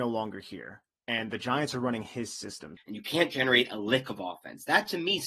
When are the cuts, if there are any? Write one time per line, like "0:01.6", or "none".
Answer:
0:02.8